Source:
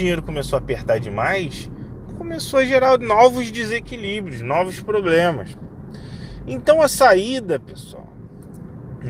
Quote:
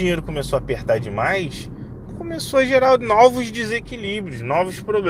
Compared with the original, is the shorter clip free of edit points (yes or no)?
yes